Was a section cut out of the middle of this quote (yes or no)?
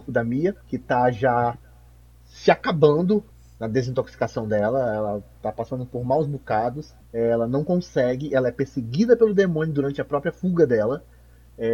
yes